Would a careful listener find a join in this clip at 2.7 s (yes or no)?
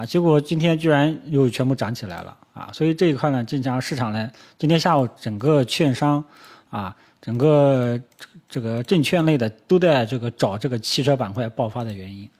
no